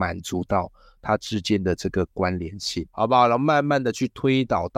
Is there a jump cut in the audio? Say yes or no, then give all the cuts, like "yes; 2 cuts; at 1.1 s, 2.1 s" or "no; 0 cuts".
yes; 1 cut; at 2.9 s